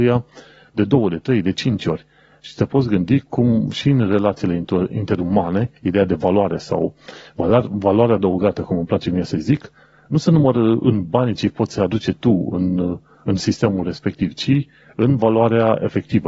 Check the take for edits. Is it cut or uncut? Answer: uncut